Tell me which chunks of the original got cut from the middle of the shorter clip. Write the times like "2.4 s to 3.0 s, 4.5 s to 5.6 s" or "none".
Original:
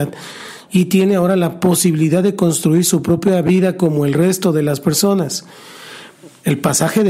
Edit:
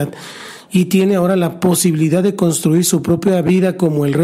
none